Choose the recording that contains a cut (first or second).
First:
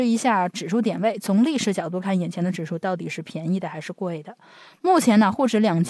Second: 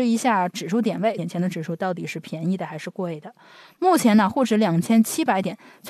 second